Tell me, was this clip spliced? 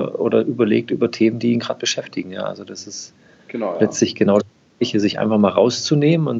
no; 0 cuts

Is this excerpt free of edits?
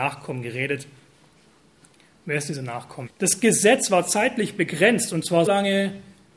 no; 2 cuts; at 3.1 s, 5.5 s

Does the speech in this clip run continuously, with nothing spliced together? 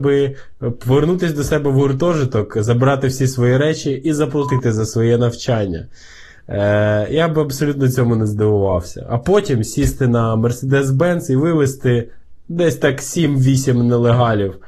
yes; 0 cuts

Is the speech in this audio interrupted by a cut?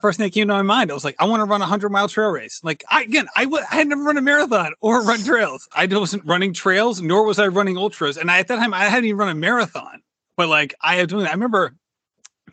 yes; 1 cut; at 5.7 s

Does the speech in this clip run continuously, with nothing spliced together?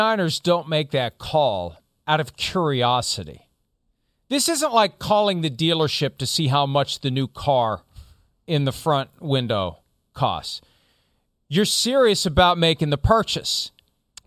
yes; 0 cuts

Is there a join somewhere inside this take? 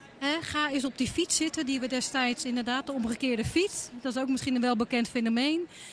no; 0 cuts

